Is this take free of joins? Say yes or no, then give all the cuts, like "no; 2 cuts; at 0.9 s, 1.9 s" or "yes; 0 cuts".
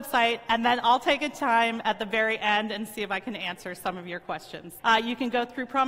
no; 1 cut; at 4.8 s